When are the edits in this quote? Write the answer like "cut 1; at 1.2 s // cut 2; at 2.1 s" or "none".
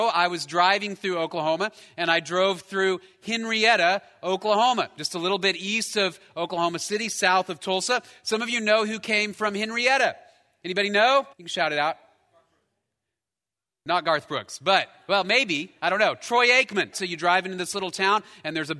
cut 1; at 11.3 s // cut 2; at 16.9 s